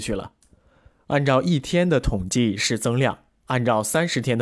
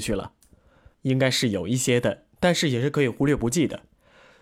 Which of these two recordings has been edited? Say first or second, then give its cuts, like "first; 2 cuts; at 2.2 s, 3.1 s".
second; 1 cut; at 0.9 s